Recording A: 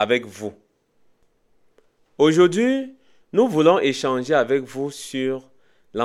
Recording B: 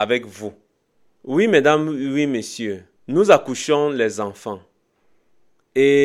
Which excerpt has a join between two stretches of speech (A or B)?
B